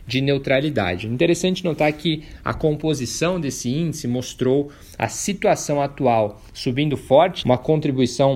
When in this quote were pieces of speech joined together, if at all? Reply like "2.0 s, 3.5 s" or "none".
7.4 s